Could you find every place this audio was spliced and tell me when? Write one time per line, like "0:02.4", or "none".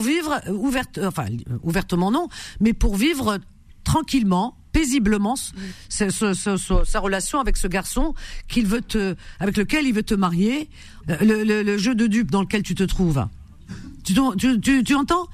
0:04.7
0:11.0